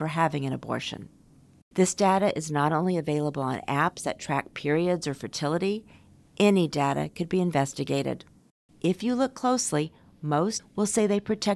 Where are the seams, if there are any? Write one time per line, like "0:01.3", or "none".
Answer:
0:08.7
0:10.6